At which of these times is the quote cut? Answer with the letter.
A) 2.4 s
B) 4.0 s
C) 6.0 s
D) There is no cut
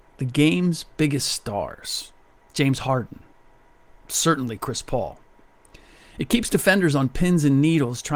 A